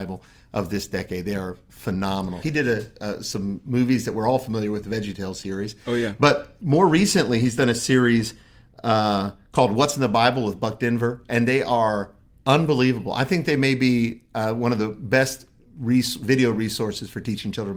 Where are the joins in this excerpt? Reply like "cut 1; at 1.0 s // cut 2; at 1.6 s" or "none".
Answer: cut 1; at 2.4 s